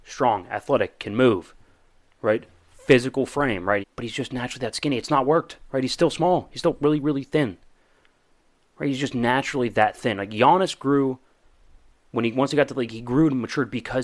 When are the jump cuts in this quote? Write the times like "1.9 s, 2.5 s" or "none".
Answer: 3.8 s

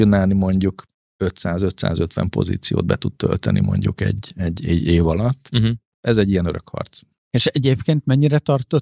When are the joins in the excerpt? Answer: 5.9 s

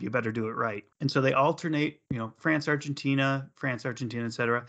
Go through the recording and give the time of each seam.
0.9 s, 2.1 s

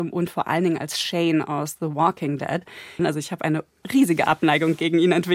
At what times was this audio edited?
3.0 s

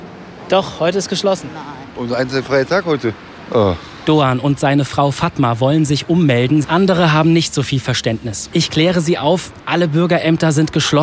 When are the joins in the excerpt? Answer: 6.6 s, 8.5 s

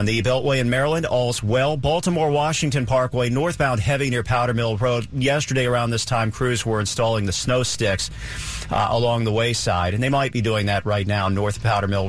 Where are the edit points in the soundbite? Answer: none

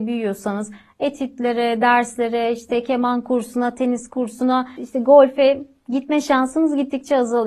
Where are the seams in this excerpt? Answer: none

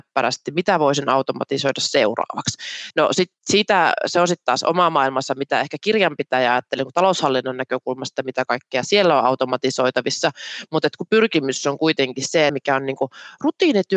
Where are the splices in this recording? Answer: 2.9 s, 12.5 s

